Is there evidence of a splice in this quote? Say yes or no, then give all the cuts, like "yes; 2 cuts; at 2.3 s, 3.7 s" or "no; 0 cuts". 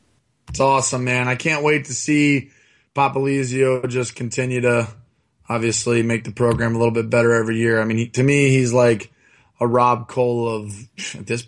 no; 0 cuts